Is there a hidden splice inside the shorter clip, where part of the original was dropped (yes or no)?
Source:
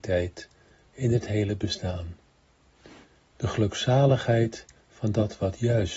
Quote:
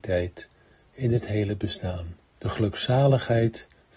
yes